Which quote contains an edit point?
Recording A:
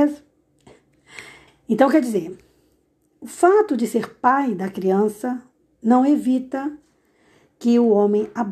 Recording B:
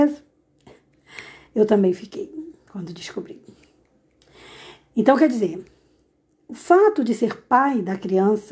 A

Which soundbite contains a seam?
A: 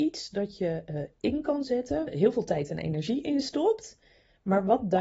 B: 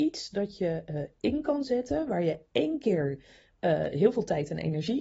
A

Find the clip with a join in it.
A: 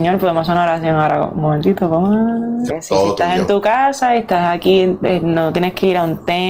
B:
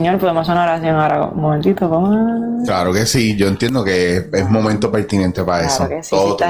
A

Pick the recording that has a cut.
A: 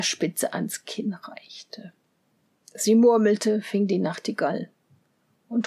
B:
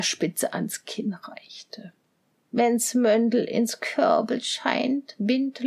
B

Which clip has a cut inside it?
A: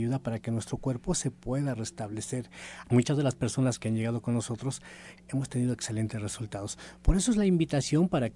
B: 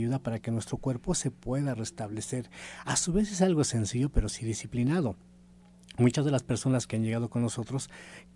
A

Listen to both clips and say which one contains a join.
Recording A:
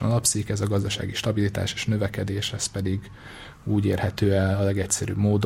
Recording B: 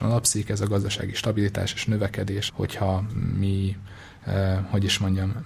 B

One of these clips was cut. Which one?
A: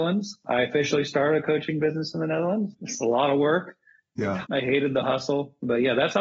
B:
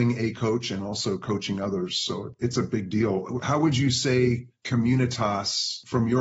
A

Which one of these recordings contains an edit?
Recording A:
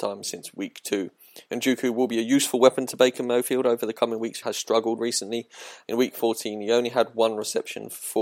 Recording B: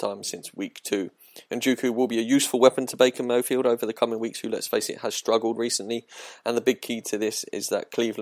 A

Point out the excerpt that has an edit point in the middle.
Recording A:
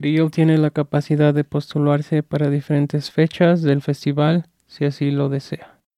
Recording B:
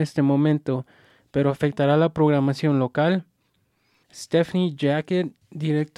B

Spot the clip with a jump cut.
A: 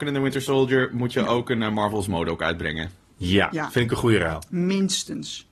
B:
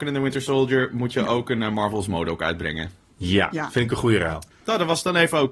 B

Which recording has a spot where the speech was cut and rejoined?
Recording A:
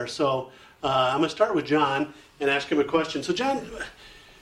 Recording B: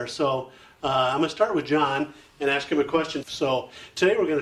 B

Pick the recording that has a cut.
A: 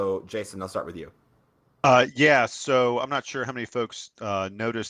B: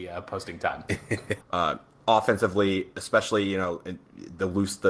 B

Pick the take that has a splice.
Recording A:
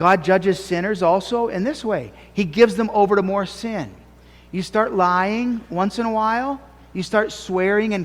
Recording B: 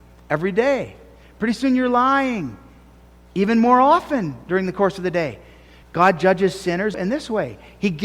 B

